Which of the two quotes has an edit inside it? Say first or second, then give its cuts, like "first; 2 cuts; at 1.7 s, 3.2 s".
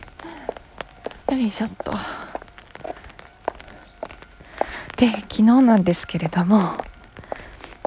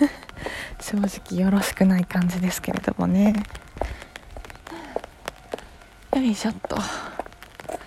first; 1 cut; at 1.2 s